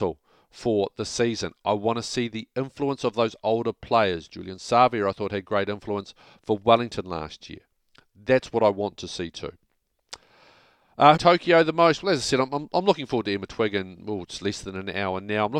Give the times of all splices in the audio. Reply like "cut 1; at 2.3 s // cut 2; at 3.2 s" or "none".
cut 1; at 11.1 s